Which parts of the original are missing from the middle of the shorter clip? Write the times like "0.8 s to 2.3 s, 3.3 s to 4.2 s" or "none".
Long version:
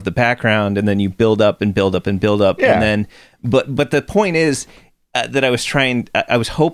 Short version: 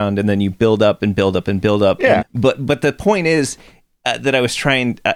2.8 s to 3.3 s